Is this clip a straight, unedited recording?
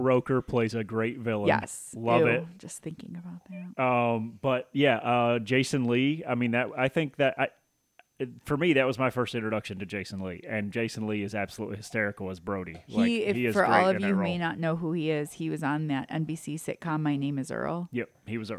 yes; 0 cuts

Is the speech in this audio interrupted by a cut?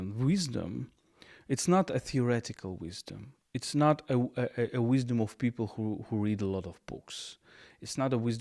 no; 0 cuts

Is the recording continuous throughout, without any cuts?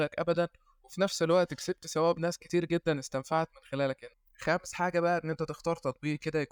yes; 0 cuts

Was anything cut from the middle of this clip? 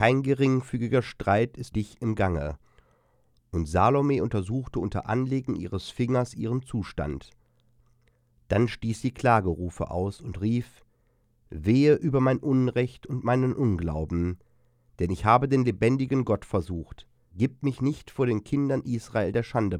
yes; 2 cuts; at 1.7 s, 17.2 s

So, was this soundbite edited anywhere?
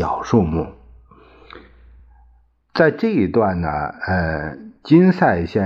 no; 0 cuts

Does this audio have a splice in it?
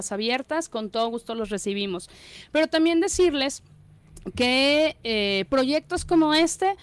no; 0 cuts

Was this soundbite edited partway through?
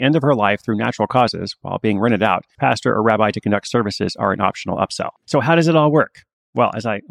yes; 2 cuts; at 2.6 s, 5.2 s

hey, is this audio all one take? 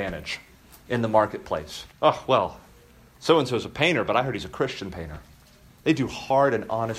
no; 2 cuts; at 1.9 s, 5.7 s

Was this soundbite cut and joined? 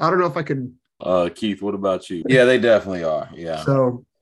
yes; 2 cuts; at 1.0 s, 2.2 s

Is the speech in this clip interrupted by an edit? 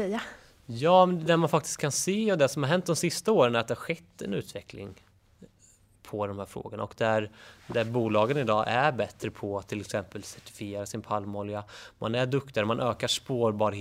no; 0 cuts

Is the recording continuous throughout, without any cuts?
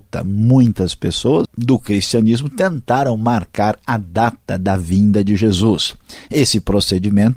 no; 1 cut; at 1.4 s

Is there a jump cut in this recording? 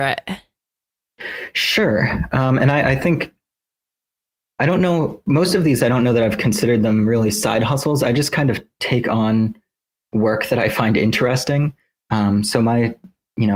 no; 0 cuts

